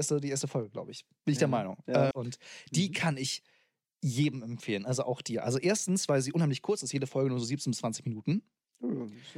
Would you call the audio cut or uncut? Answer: cut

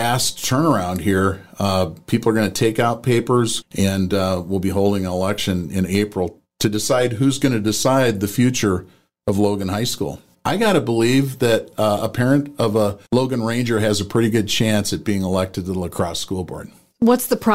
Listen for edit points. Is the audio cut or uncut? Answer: cut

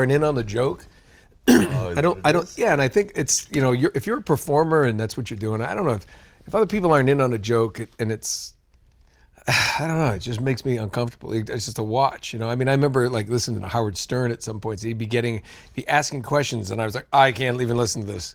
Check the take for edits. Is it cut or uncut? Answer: uncut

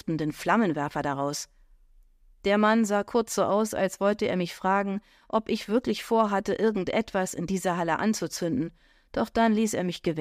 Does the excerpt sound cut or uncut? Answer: uncut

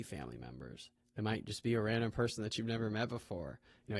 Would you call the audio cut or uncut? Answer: uncut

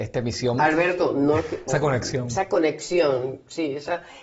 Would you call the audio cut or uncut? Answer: cut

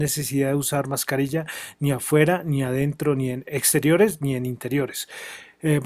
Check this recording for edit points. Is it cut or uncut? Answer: uncut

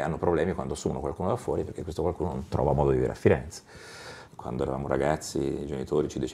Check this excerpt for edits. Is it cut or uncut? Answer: cut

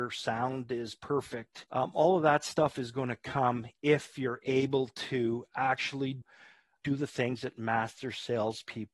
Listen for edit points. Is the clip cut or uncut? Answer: uncut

